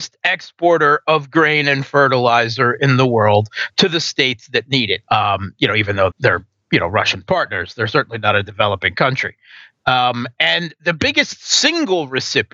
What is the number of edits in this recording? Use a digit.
2